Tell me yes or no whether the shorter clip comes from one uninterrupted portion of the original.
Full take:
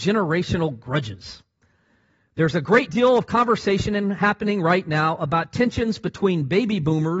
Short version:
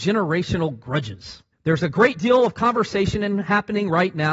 no